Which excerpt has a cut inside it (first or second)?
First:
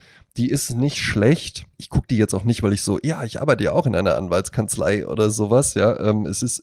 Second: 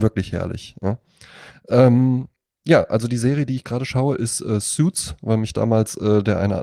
first